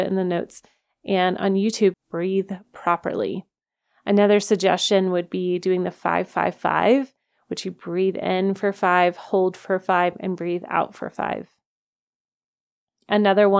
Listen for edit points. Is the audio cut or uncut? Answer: cut